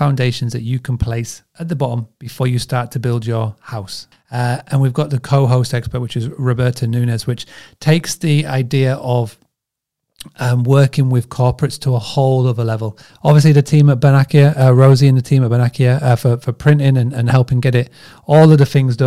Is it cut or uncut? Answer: cut